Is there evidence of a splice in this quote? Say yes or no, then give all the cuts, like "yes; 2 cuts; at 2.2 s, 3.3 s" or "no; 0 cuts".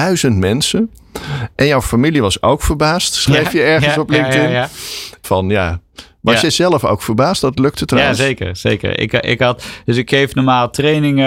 yes; 1 cut; at 5.2 s